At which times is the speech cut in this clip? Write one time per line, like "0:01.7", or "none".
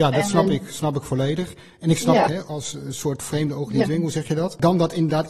0:02.3